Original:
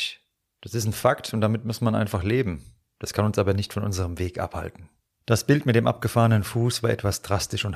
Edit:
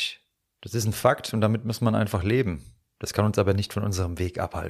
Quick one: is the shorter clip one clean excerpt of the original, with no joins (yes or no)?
yes